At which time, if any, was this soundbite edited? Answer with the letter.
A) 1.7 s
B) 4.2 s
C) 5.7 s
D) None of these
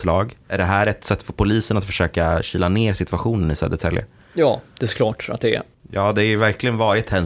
C